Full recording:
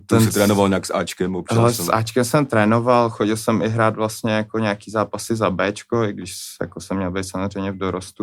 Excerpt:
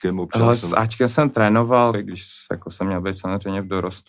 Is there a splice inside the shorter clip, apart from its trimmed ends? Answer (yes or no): yes